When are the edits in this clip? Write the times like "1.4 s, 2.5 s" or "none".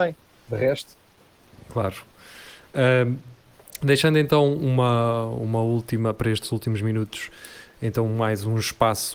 none